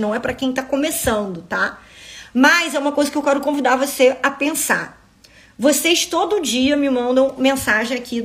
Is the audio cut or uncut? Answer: uncut